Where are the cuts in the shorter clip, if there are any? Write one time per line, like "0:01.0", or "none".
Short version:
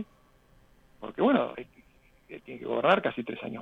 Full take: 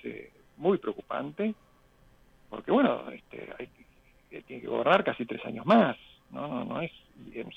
0:01.5